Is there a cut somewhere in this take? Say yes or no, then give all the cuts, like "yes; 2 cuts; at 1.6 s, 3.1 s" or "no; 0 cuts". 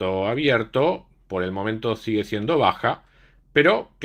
no; 0 cuts